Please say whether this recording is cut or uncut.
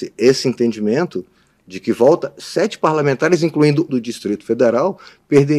cut